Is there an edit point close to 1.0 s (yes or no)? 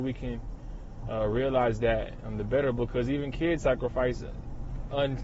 no